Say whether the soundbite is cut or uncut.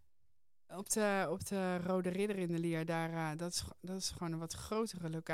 uncut